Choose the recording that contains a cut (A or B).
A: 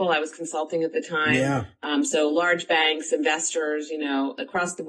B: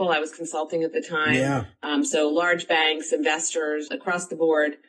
B